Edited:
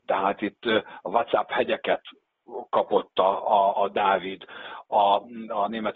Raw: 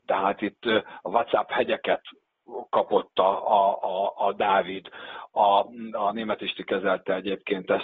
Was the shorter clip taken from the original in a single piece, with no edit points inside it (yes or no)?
no